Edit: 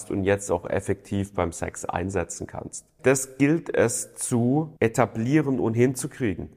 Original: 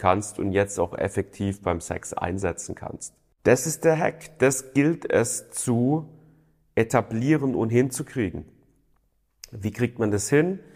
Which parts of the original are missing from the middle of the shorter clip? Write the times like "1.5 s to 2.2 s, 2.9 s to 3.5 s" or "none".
3.3 s to 4.3 s, 6.1 s to 6.7 s